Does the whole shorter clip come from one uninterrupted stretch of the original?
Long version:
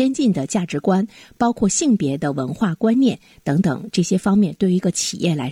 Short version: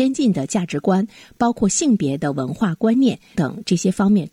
no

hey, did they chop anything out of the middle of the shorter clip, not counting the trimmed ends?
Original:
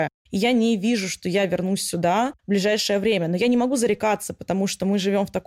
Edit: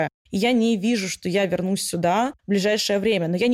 no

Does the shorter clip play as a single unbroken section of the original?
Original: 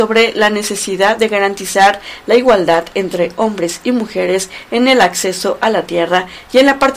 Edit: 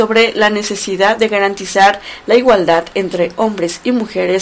yes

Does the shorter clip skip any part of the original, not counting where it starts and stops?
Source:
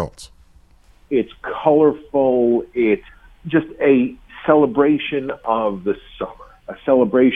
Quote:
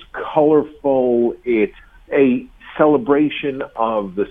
yes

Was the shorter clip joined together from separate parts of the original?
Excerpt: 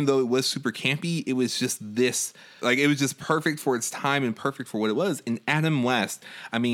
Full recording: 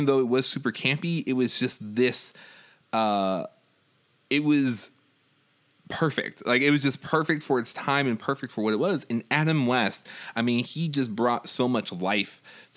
yes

